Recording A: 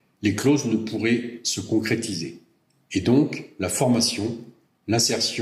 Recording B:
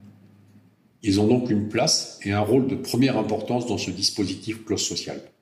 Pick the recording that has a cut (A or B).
B